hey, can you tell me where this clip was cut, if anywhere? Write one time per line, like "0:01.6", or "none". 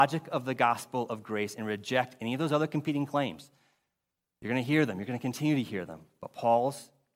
none